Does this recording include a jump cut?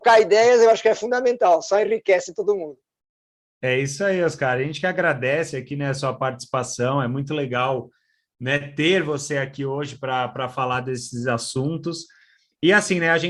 no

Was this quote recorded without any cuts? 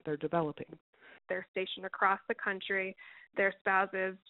no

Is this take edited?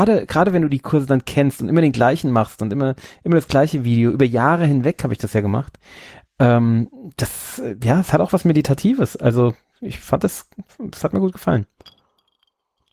no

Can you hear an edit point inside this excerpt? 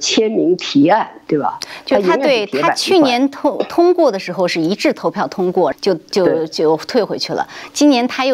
yes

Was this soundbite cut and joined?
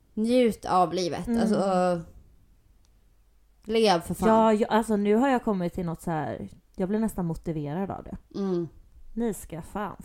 yes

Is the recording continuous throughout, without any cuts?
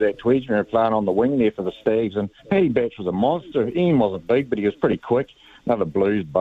no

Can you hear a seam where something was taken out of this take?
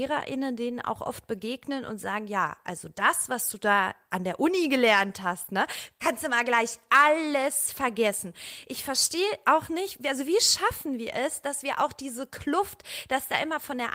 no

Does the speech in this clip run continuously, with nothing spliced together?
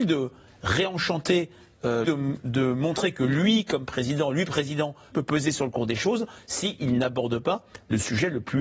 no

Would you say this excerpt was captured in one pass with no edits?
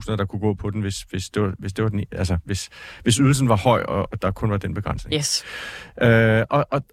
yes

